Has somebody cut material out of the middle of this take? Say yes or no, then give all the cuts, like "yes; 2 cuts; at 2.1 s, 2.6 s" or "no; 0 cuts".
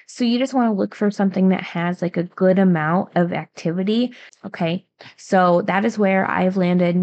yes; 1 cut; at 4.3 s